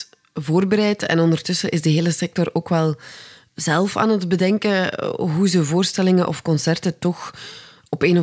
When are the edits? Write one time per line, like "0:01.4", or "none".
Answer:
none